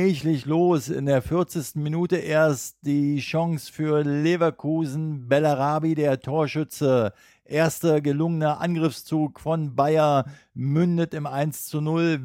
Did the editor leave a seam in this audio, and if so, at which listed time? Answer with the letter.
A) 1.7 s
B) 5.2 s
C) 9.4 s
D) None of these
D